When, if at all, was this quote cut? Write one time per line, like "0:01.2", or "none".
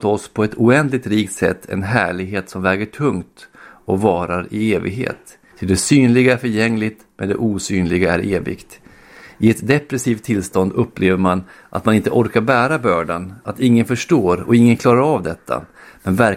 0:05.5